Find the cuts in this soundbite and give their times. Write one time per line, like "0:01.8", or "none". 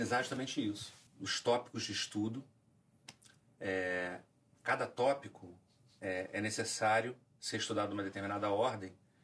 0:01.1